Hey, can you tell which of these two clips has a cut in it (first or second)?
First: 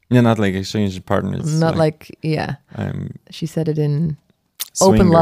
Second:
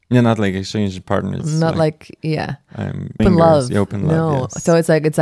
second